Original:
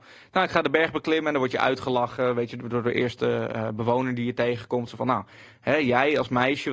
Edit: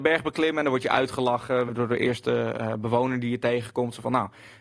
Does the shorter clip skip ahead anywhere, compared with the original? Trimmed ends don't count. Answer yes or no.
yes